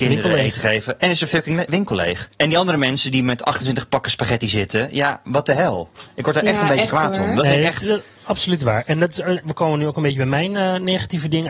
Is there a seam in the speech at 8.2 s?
no; 2 cuts; at 2.3 s, 9.4 s

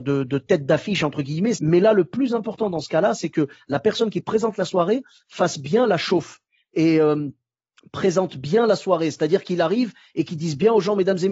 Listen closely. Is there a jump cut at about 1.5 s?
yes; 1 cut; at 1.5 s

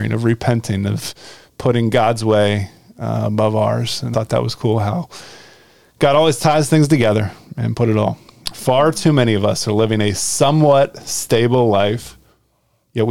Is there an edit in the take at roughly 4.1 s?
yes; 2 cuts; at 4.1 s, 8.5 s

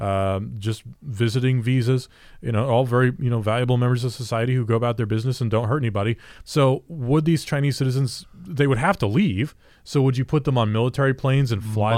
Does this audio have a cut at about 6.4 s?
yes; 1 cut; at 6.4 s

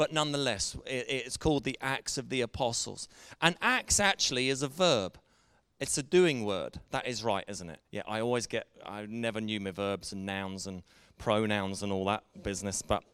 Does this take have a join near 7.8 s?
yes; 1 cut; at 7.8 s

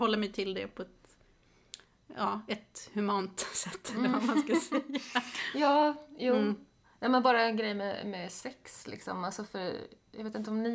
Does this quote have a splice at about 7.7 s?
no; 0 cuts

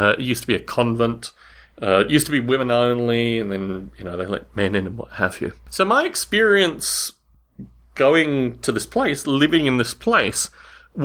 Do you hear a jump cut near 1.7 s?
no; 0 cuts

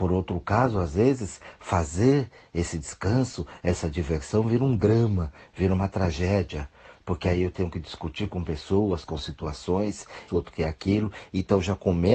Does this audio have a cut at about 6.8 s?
no; 2 cuts; at 9.0 s, 10.3 s

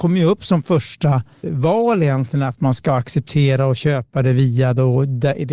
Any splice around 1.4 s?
yes; 1 cut; at 1.4 s

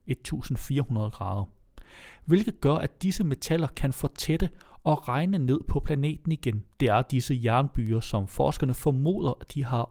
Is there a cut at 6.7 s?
yes; 1 cut; at 6.7 s

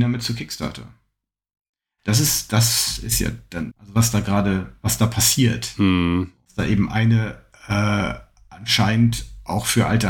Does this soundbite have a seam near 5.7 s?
no; 0 cuts

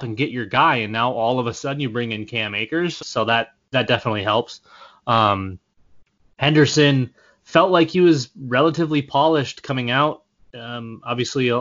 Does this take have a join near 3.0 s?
yes; 1 cut; at 3.0 s

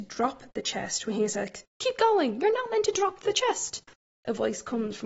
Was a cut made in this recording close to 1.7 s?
yes; 1 cut; at 1.7 s

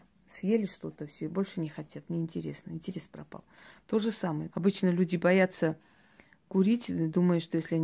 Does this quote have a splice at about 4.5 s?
yes; 1 cut; at 4.5 s

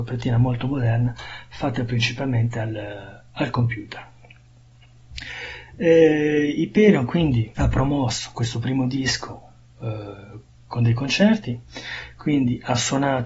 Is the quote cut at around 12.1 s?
no; 1 cut; at 7.5 s

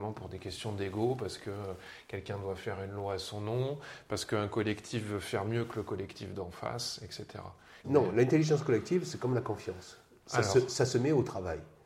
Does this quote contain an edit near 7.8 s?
yes; 1 cut; at 7.8 s

